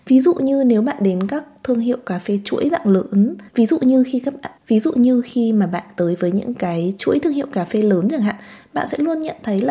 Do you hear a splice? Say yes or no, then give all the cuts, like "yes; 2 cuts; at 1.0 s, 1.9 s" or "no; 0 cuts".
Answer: yes; 2 cuts; at 3.5 s, 4.6 s